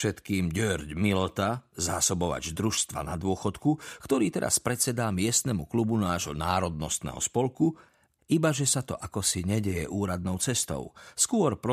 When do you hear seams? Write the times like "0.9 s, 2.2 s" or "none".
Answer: 8.2 s